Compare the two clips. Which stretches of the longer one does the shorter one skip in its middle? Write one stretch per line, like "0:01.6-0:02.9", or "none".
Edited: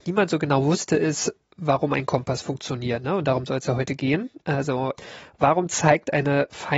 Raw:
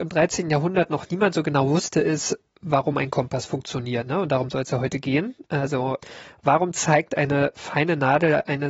none

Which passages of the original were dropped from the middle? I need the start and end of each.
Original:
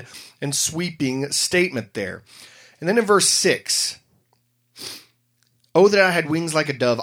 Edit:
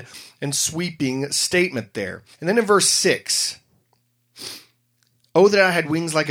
0:02.3-0:02.7

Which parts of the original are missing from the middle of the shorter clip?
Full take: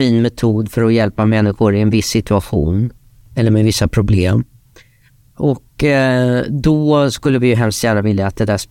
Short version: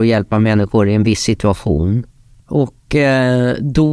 0:03.3-0:05.3

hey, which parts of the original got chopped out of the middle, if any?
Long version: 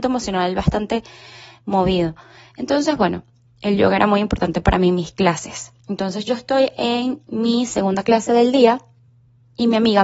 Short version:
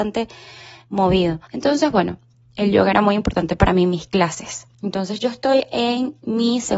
0:02.2-0:02.5

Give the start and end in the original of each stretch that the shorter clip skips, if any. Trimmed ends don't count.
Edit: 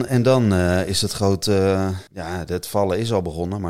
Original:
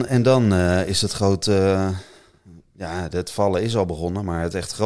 0:02.1-0:02.7

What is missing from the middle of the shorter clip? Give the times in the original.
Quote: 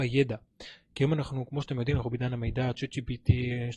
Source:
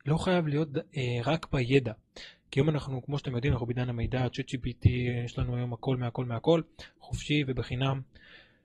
none

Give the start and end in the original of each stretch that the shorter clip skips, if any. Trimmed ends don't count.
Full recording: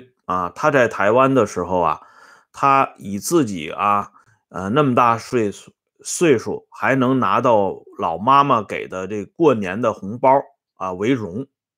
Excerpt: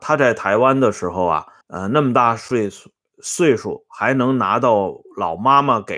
0:02.1-0:04.4

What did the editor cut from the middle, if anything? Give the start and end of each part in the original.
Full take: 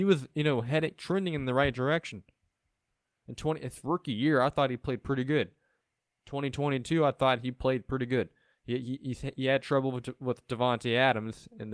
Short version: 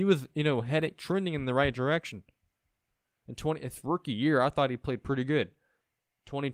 none

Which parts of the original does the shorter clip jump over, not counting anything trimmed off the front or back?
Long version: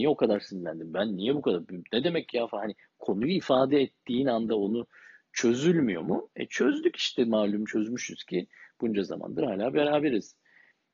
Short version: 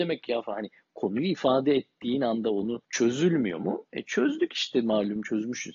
0:04.9-0:05.3

